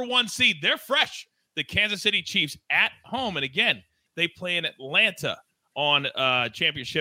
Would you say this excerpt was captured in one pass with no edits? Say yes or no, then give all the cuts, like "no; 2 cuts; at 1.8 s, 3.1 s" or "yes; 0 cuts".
no; 1 cut; at 4.1 s